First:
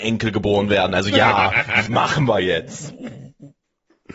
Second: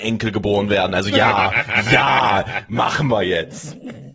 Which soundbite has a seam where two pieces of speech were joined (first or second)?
first